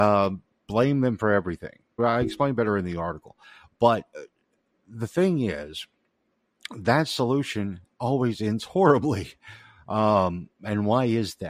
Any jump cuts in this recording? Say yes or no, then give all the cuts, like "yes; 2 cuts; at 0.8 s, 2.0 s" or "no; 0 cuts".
yes; 1 cut; at 2.0 s